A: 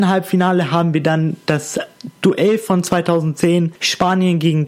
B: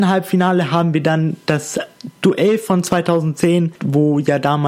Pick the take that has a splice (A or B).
B